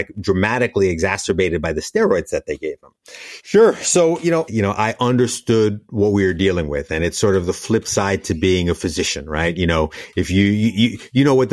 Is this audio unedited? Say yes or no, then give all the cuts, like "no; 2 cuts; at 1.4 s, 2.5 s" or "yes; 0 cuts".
no; 2 cuts; at 3.4 s, 4.5 s